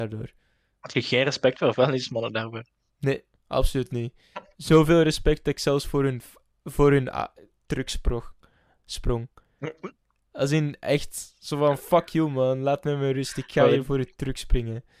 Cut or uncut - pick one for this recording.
uncut